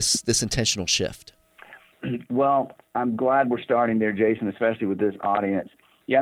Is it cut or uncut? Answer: uncut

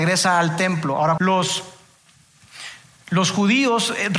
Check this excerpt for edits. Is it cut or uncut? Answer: cut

